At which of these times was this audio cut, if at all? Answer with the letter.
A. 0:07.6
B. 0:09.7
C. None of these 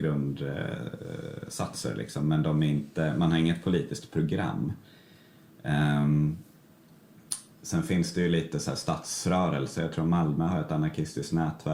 C